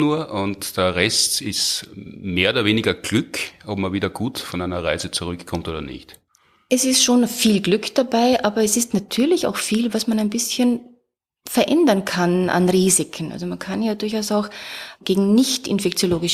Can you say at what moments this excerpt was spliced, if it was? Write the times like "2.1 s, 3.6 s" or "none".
none